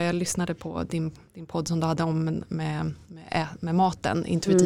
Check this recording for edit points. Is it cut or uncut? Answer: uncut